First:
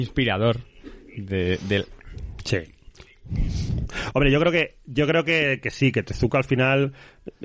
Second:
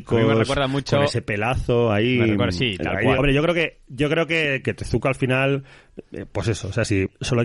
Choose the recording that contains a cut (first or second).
second